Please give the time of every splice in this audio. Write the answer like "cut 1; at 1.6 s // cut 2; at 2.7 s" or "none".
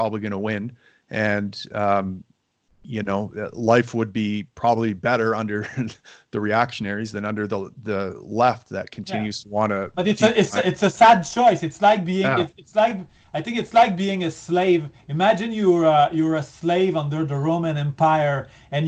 none